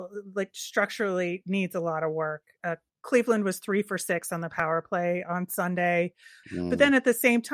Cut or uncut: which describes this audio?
cut